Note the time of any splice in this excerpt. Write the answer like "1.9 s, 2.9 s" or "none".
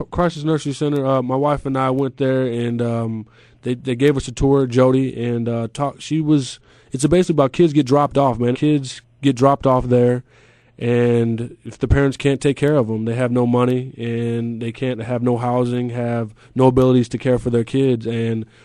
8.5 s